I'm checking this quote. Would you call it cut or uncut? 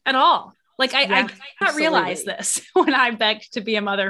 cut